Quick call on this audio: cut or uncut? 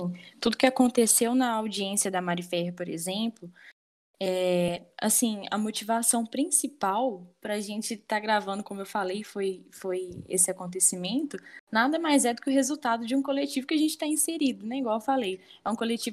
uncut